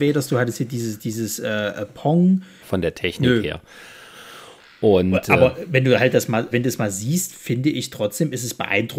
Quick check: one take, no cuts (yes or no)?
no